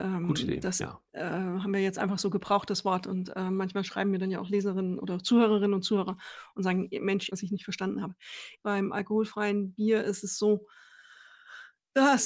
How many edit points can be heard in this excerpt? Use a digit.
2